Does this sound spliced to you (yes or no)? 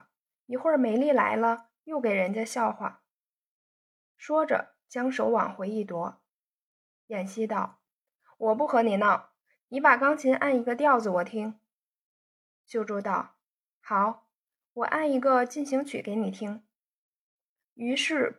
no